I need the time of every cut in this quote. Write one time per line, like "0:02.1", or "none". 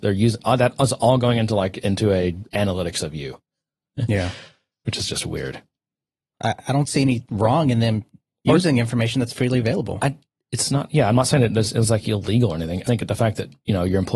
0:06.3
0:12.9